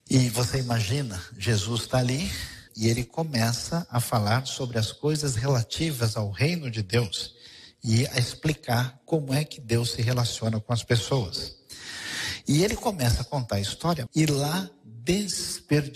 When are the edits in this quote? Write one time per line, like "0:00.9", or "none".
0:02.7
0:14.1

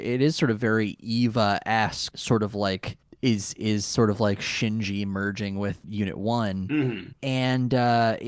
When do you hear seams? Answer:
0:02.1
0:05.8

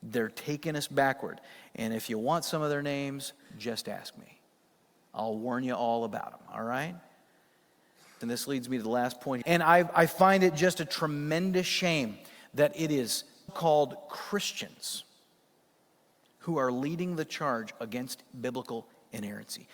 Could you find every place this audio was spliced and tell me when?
0:08.2
0:09.4
0:13.5

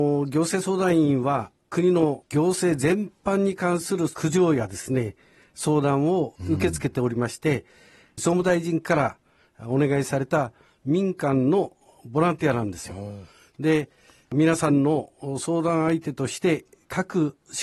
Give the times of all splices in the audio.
none

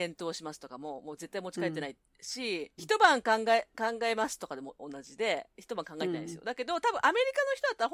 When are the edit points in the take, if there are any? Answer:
0:02.8

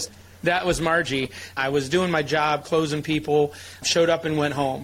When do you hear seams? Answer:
0:01.6
0:03.8

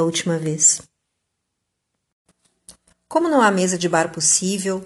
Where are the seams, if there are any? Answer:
0:02.9

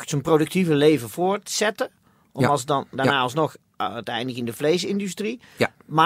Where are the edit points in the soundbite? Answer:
0:02.9

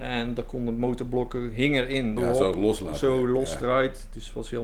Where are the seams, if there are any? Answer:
0:02.2

